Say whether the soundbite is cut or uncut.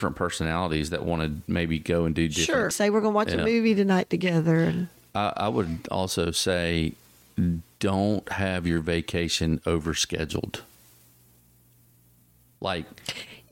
cut